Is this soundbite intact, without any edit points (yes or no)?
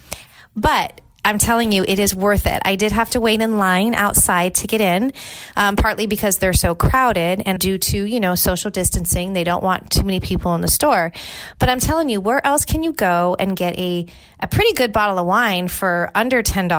no